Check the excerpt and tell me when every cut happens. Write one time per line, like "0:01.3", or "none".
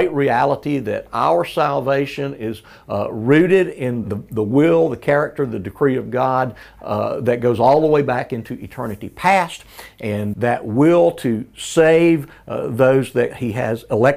0:04.0
0:10.3